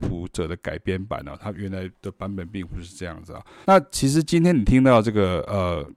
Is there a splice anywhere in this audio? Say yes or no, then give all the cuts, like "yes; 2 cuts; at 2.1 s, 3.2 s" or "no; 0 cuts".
yes; 1 cut; at 3.6 s